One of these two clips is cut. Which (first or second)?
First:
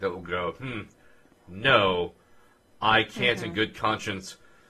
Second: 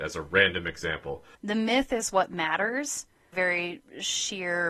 second